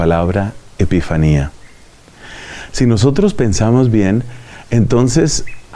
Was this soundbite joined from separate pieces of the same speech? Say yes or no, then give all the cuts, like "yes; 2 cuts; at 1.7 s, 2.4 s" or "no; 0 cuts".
no; 0 cuts